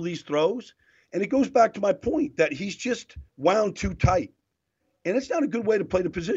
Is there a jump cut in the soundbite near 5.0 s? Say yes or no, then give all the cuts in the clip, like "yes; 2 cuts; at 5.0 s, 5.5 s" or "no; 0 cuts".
no; 1 cut; at 3.3 s